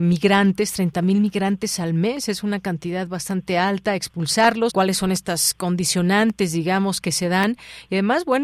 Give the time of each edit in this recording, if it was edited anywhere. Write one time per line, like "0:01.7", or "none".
0:04.7